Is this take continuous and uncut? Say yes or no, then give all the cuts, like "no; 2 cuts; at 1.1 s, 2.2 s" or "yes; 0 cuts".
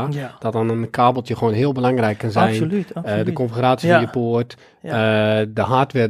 yes; 0 cuts